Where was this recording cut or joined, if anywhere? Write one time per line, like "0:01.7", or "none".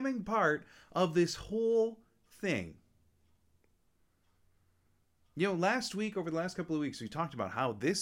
none